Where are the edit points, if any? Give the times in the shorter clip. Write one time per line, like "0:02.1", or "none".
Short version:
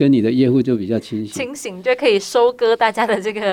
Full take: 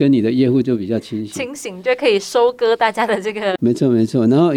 none

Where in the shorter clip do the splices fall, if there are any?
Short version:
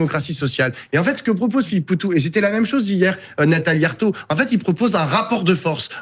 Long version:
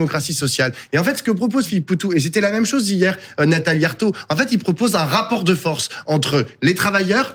none

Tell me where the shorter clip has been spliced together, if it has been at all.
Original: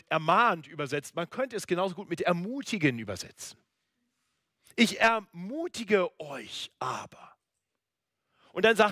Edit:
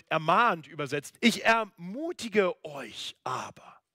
0:01.1

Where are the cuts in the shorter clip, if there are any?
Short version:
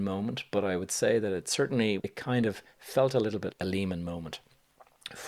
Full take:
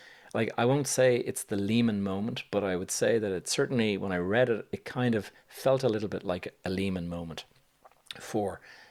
0:02.0
0:03.5

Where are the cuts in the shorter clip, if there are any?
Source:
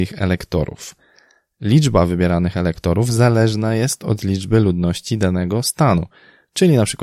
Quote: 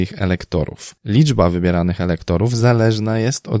0:01.0

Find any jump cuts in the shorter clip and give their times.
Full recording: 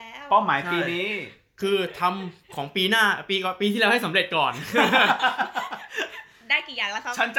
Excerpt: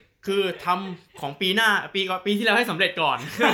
none

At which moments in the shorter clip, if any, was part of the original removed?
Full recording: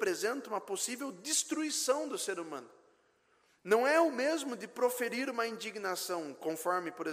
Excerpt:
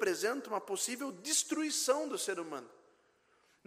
none

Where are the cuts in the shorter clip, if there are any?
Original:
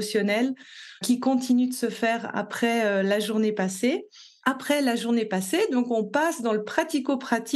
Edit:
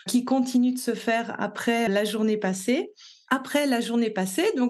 0:01.9

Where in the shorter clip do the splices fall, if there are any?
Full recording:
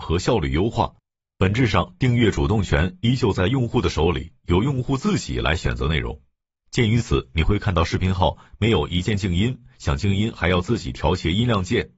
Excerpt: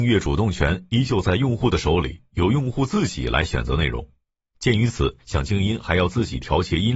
0:05.2

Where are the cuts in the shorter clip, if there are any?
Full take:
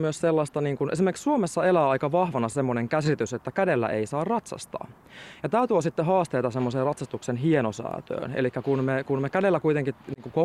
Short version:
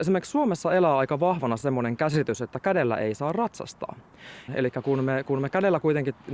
0:04.5

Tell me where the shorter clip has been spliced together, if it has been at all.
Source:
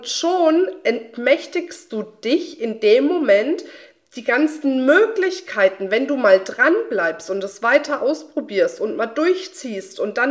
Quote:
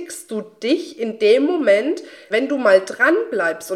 0:02.3

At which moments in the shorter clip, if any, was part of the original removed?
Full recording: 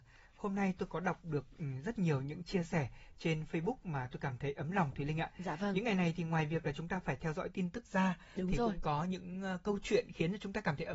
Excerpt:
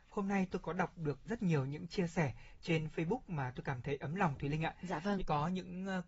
0:01.3
0:05.2

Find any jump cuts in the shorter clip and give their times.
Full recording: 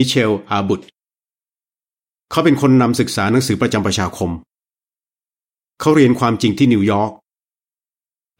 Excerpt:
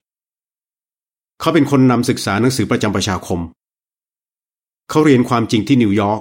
none

